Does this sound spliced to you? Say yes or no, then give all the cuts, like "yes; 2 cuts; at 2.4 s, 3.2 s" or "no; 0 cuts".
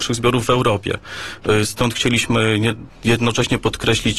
no; 0 cuts